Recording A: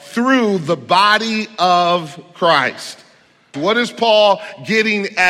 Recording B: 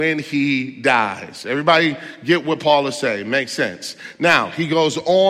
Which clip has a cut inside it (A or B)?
A